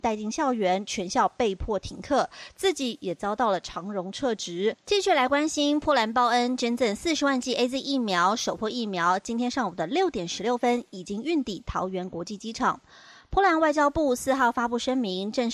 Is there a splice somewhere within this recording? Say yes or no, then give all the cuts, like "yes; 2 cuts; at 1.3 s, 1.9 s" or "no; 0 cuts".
no; 0 cuts